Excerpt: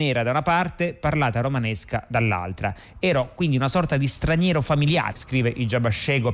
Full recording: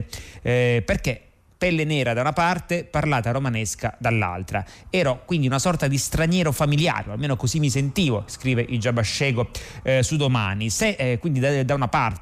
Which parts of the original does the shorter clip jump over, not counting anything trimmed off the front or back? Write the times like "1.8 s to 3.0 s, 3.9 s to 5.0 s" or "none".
7.0 s to 8.3 s

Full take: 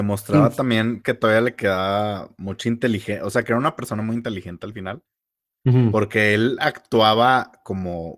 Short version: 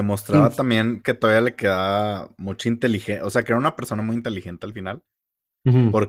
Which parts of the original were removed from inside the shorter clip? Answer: none

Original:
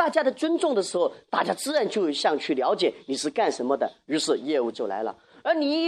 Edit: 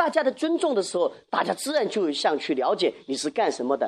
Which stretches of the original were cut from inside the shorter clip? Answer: none

